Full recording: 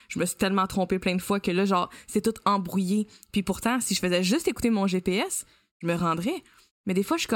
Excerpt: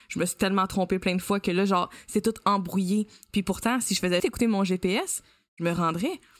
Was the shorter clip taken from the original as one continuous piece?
no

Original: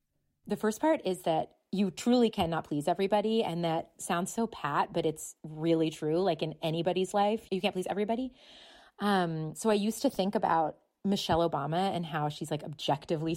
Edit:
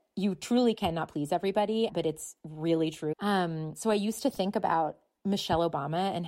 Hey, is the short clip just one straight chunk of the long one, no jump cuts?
no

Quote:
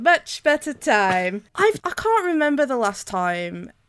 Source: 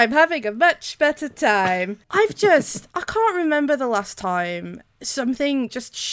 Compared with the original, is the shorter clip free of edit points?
no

